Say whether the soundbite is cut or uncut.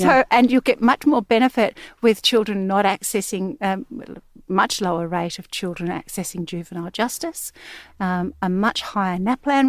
uncut